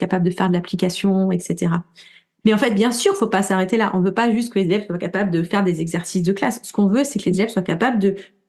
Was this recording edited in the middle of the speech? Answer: yes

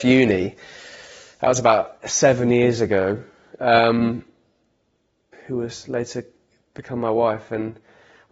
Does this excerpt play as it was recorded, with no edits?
no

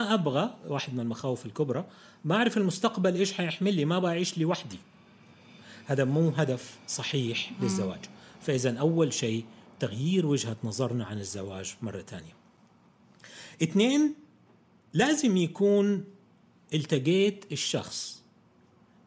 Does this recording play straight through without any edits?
yes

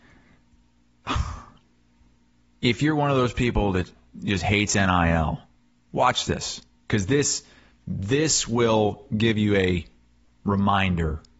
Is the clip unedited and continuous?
yes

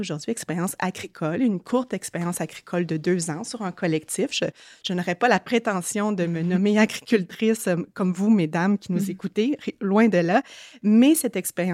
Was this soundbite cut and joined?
no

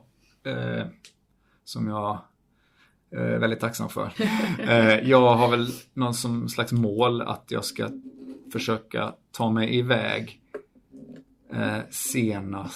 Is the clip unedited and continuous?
no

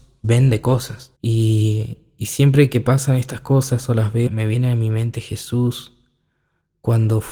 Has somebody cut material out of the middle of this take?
yes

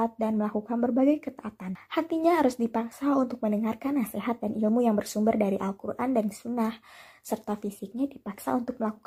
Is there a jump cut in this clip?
no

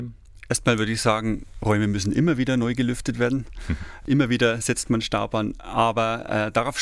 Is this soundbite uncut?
yes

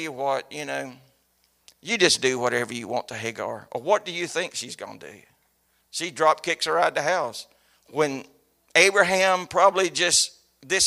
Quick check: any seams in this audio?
yes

